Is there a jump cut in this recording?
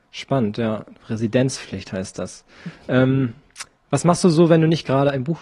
no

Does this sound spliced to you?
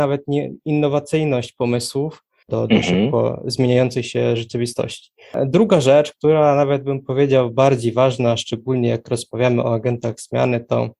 yes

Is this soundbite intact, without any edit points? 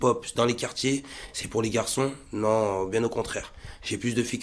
yes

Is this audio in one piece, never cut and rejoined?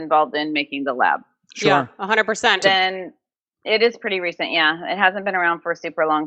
no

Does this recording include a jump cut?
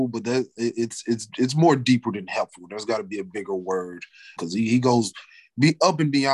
yes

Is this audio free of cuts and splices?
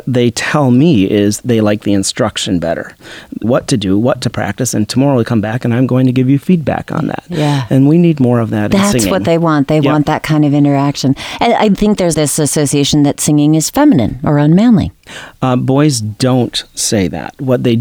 no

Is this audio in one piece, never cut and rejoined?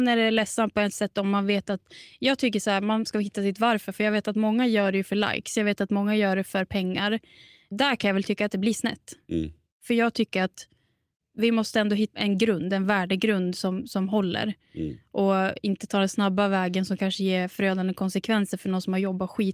no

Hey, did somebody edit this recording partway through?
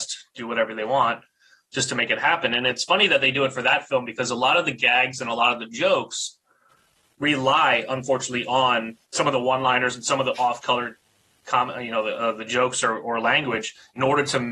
yes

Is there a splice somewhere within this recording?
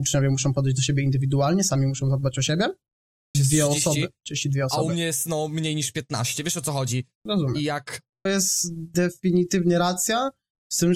yes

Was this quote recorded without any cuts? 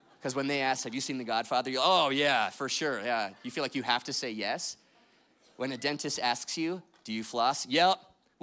yes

